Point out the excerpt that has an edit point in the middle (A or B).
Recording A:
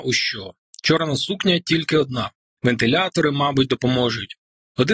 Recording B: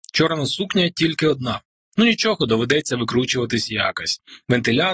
A